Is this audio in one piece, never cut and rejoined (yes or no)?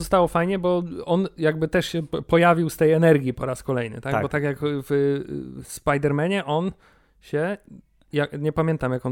yes